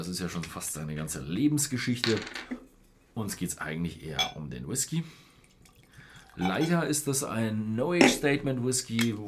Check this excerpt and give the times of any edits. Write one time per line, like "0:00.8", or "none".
none